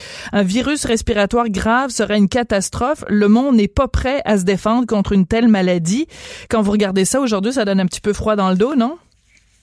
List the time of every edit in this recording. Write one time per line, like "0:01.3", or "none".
none